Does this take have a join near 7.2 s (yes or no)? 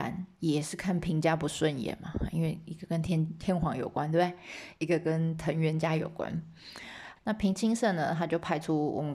yes